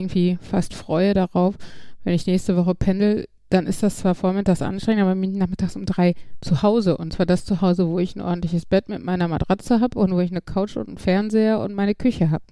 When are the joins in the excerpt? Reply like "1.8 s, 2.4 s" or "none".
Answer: none